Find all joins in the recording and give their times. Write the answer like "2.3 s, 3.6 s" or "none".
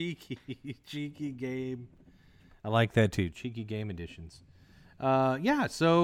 none